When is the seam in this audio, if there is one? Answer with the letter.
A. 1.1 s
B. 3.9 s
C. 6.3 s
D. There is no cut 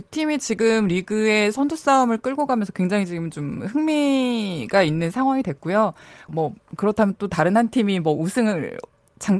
C